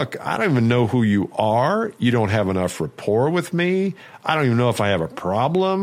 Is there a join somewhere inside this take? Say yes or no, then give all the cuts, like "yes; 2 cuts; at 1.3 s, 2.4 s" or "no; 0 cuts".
no; 0 cuts